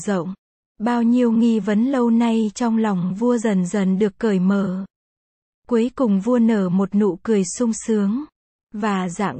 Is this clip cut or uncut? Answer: uncut